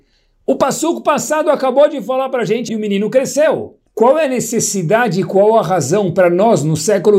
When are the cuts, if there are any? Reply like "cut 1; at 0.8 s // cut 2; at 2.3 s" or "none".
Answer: cut 1; at 2.7 s // cut 2; at 3.9 s